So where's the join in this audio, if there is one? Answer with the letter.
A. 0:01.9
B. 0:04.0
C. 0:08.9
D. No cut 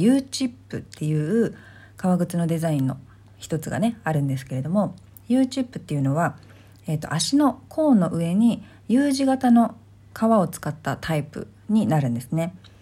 D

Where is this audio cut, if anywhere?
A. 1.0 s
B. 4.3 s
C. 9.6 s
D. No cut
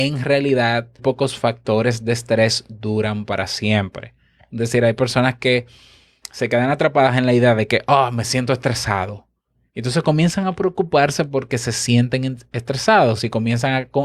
A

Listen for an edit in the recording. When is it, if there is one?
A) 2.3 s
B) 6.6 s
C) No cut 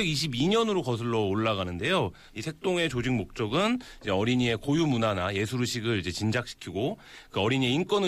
A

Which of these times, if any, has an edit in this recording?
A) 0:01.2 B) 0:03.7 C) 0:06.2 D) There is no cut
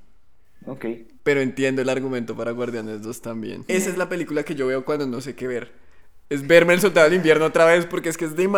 B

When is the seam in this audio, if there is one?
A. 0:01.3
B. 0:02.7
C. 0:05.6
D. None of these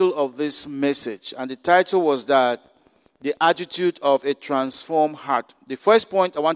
D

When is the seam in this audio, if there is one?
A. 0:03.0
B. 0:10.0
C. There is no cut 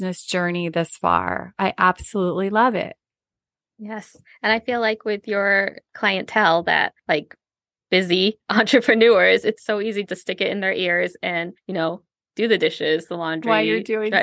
B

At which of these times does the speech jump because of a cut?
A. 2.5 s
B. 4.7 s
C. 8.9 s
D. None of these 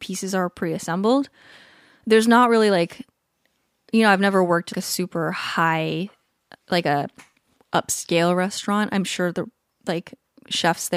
B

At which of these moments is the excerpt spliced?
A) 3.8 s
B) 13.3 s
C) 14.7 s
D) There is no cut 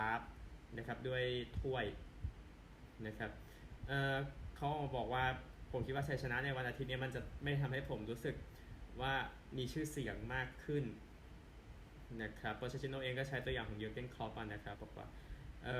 C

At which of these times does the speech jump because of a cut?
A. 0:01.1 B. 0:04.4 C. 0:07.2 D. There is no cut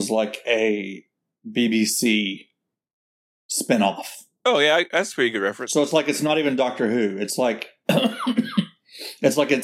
D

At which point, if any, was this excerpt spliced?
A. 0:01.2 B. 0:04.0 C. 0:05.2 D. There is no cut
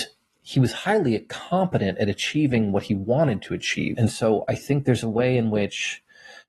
B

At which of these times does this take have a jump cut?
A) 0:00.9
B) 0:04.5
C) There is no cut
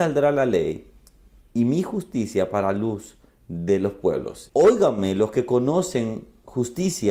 B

